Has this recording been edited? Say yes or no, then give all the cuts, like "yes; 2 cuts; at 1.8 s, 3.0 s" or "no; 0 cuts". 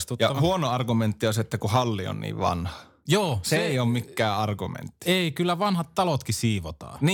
no; 0 cuts